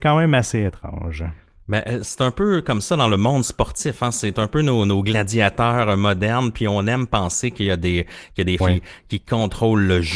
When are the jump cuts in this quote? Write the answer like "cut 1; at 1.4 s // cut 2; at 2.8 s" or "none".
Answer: cut 1; at 8.6 s